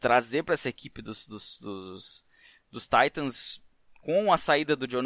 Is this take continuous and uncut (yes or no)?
yes